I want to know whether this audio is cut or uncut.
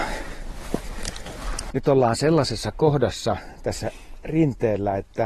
cut